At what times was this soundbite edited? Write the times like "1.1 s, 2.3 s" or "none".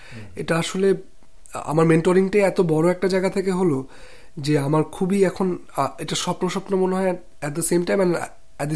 none